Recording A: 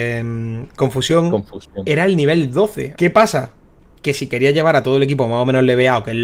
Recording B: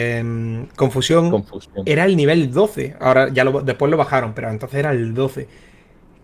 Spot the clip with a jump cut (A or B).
A